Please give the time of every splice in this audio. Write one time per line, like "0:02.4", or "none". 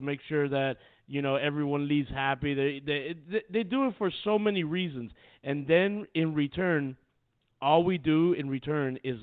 none